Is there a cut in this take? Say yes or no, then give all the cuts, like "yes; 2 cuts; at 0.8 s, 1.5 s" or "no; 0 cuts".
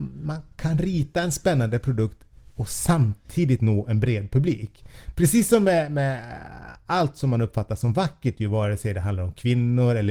no; 0 cuts